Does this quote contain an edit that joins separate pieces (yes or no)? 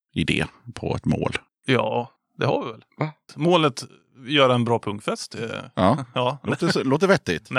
no